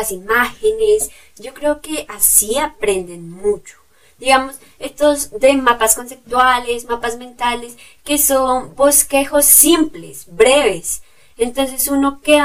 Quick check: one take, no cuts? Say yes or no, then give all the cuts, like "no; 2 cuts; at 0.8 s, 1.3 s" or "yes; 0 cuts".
yes; 0 cuts